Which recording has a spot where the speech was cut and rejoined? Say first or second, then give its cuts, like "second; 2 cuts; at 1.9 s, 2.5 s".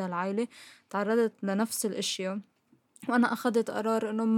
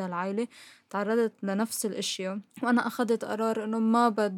second; 1 cut; at 2.5 s